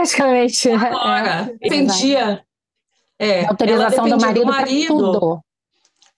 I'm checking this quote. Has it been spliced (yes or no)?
yes